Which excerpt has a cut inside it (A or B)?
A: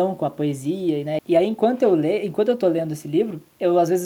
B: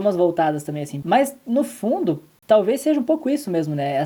A